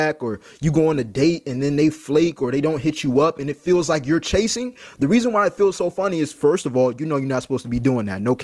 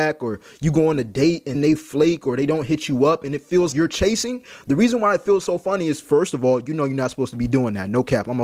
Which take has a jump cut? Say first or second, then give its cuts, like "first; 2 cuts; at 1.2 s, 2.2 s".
second; 2 cuts; at 1.5 s, 3.7 s